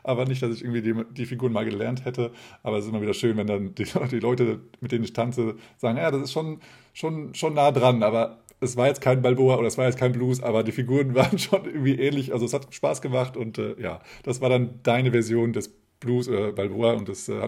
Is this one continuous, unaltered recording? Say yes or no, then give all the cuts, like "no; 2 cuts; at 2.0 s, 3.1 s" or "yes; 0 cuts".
yes; 0 cuts